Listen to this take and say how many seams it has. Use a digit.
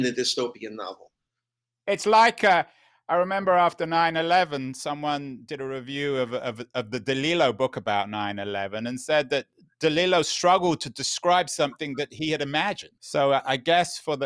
1